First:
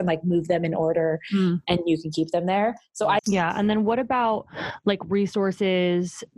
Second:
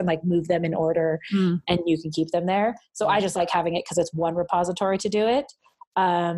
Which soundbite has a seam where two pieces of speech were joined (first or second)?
first